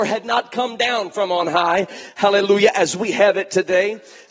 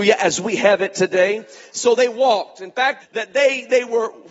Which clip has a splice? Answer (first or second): second